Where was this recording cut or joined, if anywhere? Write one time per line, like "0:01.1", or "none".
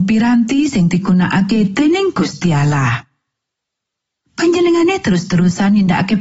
0:04.2